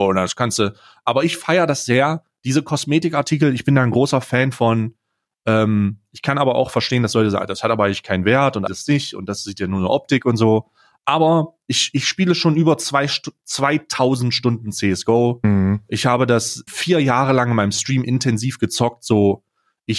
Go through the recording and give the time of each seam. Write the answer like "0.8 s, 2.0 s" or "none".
8.7 s, 16.7 s